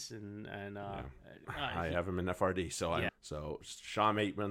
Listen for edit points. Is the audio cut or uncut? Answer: cut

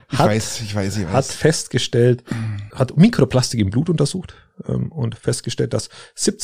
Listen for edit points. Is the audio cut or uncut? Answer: cut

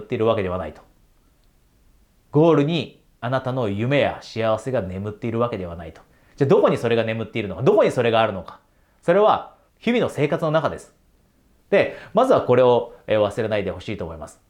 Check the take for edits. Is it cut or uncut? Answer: cut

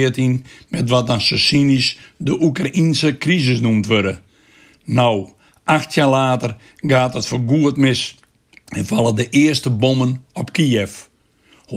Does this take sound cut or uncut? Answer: uncut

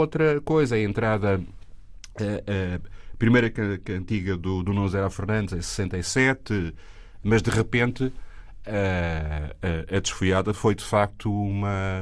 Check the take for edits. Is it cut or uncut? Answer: cut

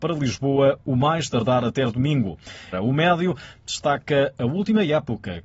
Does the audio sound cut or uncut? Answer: cut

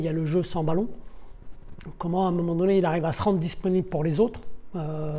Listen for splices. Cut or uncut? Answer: uncut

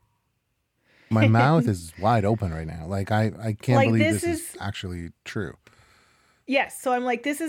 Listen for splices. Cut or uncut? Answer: cut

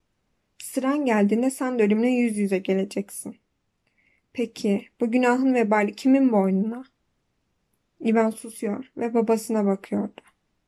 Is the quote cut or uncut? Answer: uncut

